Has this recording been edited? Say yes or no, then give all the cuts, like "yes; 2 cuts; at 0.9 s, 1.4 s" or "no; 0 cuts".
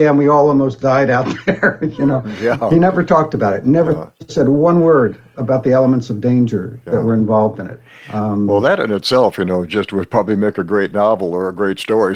no; 0 cuts